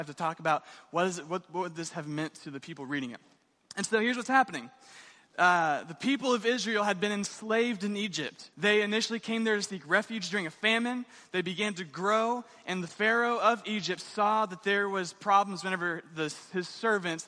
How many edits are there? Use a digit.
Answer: 1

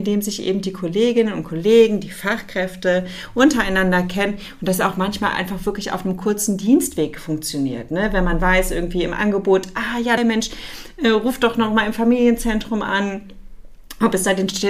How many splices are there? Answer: 1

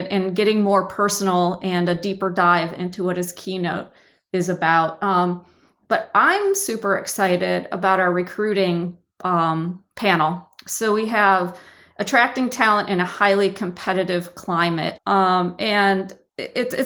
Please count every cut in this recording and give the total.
1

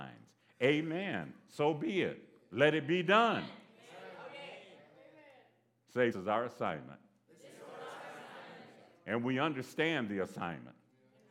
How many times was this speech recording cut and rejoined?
1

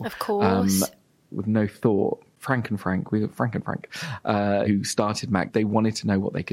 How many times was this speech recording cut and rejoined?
1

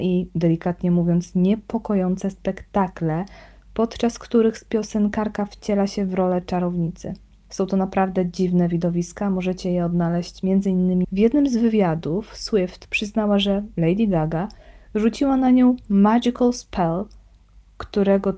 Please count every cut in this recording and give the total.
1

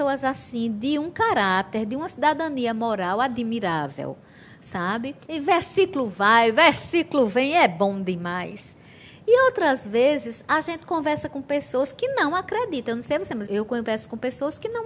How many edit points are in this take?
2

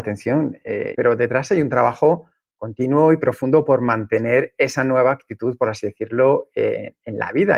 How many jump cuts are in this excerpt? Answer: 1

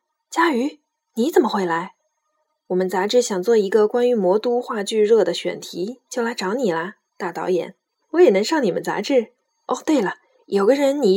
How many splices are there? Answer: 2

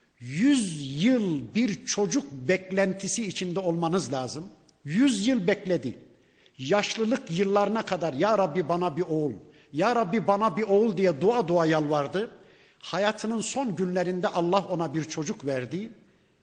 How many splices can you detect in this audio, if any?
0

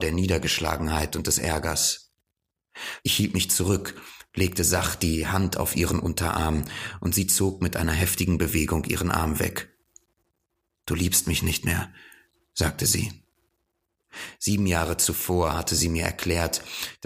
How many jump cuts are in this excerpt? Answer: 1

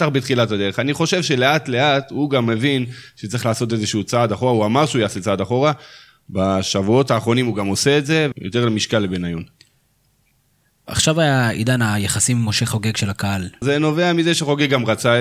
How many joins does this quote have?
2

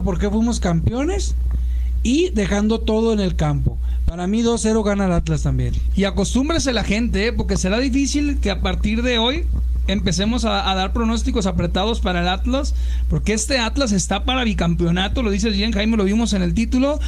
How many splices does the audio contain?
0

